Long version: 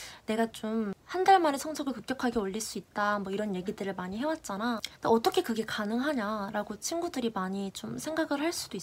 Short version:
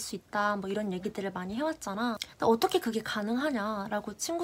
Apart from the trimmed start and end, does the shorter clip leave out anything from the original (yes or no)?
no